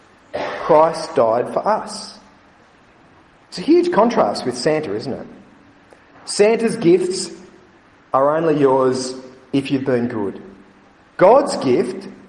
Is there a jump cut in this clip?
no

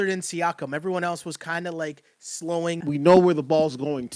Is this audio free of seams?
no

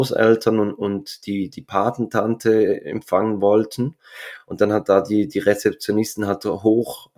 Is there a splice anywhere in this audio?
no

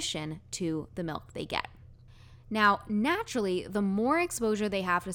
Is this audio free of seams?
yes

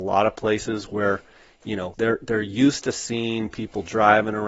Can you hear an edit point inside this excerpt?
yes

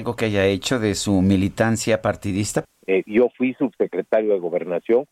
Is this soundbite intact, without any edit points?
no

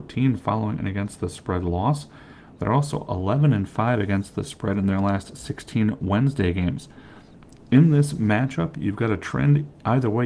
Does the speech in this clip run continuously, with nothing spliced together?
yes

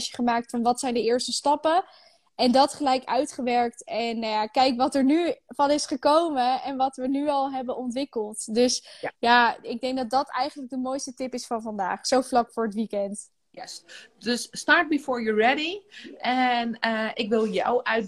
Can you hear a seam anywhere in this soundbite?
no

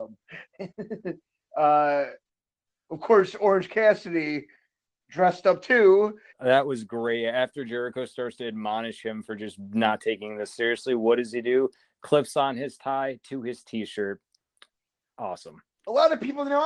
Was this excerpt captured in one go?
no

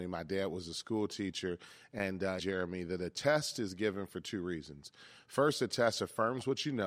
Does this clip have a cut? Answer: yes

